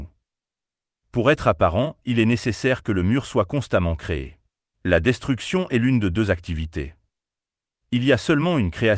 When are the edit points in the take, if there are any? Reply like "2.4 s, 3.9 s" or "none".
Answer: 4.7 s, 7.7 s